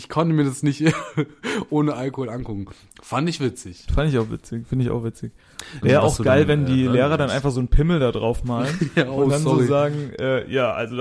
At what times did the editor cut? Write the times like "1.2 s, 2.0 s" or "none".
5.8 s